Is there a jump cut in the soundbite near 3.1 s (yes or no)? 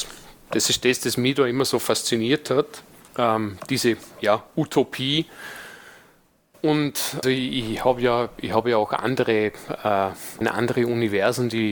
yes